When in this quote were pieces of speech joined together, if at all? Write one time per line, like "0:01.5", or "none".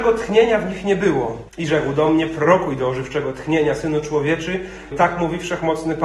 0:01.5
0:04.9